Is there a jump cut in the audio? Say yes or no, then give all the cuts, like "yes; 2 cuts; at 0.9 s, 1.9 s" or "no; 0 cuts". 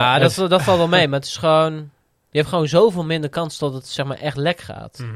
no; 0 cuts